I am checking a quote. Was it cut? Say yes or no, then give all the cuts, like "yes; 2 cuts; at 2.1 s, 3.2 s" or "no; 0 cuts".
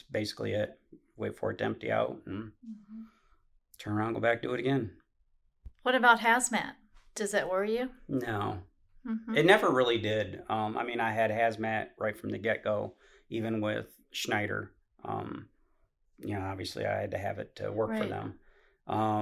no; 0 cuts